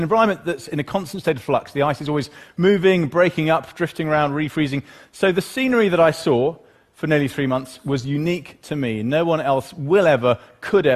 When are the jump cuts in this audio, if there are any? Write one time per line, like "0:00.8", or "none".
none